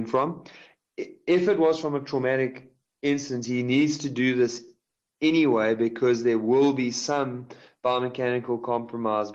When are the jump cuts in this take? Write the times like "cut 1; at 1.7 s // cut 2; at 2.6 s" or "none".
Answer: none

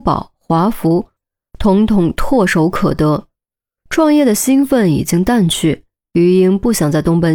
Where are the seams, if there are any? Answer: none

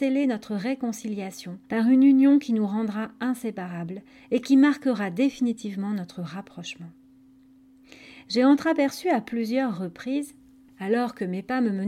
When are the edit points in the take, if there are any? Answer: cut 1; at 1.6 s

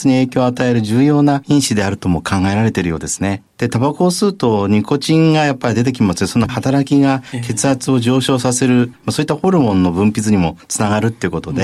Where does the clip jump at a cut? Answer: none

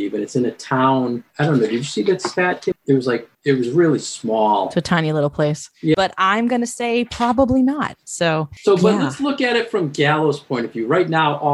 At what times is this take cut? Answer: cut 1; at 2.7 s // cut 2; at 5.9 s

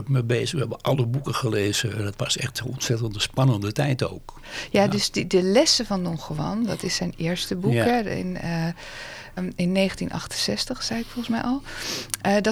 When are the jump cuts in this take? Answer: cut 1; at 9.4 s

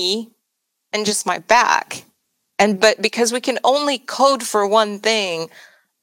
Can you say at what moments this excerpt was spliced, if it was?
none

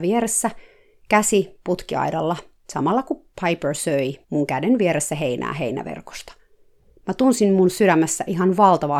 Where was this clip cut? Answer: cut 1; at 4.2 s

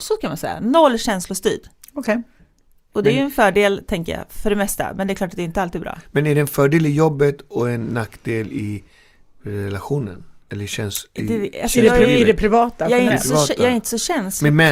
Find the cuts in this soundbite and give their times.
none

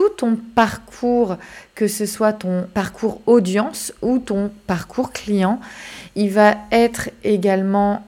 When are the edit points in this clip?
cut 1; at 2.7 s

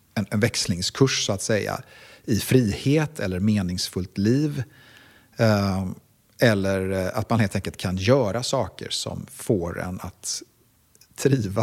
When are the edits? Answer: none

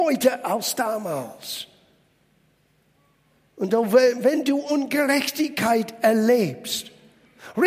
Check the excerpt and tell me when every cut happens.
none

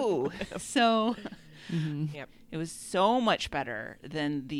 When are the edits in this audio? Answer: cut 1; at 2.1 s

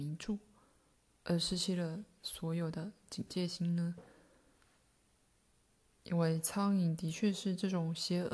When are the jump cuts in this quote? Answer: none

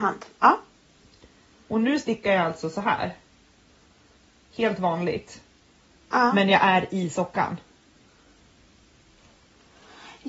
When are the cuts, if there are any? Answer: none

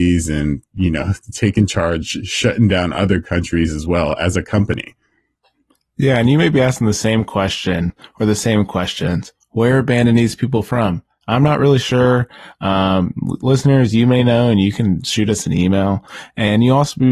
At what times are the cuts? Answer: none

